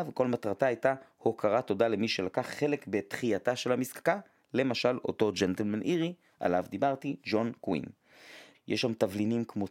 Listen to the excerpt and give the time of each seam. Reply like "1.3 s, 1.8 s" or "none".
8.5 s